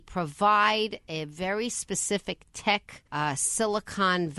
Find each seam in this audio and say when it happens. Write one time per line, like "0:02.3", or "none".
0:03.1